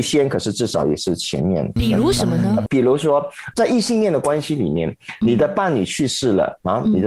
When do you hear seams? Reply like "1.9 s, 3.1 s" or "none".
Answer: 1.8 s